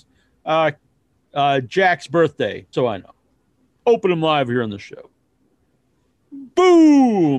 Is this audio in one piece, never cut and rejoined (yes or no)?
no